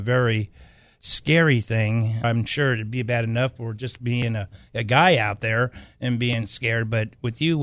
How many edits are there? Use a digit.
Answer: 1